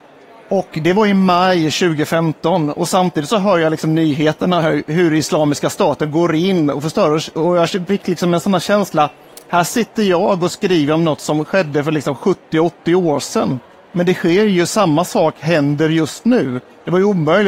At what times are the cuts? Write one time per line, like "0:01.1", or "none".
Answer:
none